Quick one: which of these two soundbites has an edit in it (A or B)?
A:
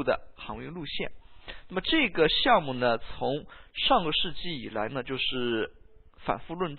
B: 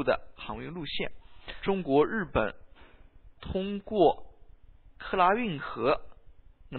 B